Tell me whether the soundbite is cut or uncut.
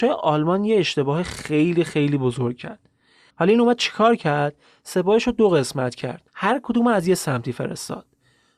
cut